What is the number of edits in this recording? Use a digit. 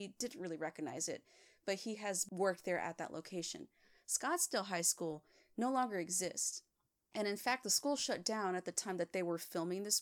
0